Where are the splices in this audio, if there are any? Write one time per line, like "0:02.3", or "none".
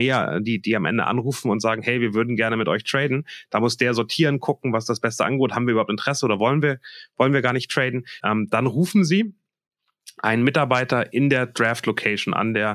0:08.2